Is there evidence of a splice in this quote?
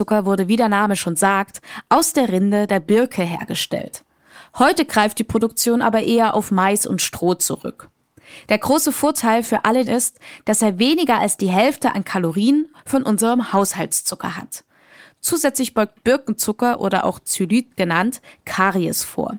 yes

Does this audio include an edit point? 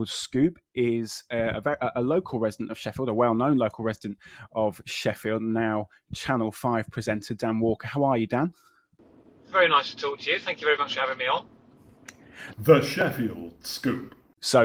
yes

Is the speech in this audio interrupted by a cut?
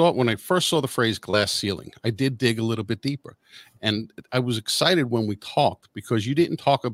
no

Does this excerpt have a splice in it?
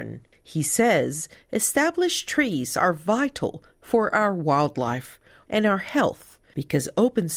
yes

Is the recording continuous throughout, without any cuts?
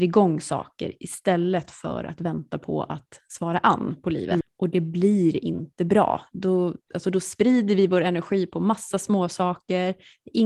no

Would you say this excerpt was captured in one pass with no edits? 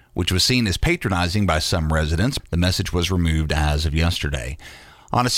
no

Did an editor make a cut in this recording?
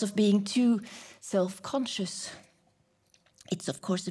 no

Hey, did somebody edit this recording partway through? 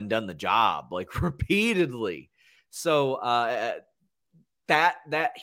no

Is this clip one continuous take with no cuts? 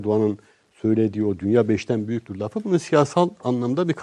yes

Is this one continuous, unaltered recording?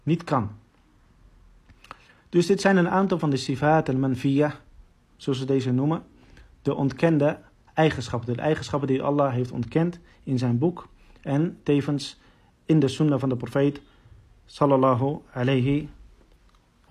yes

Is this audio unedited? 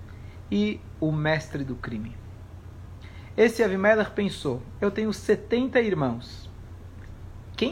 yes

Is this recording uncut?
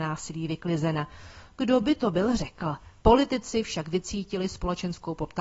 no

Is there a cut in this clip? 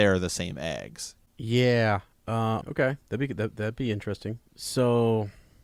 yes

